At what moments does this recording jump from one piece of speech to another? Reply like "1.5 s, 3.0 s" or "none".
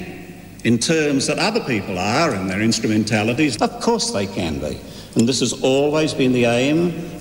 3.6 s